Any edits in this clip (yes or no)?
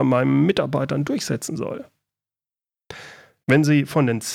yes